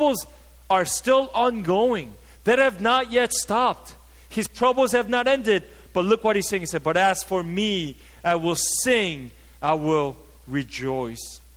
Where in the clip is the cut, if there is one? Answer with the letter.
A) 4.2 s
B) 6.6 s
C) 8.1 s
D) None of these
D